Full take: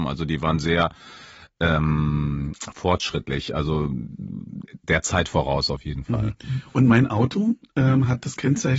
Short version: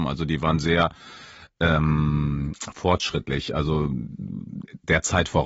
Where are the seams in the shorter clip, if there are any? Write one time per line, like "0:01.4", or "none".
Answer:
none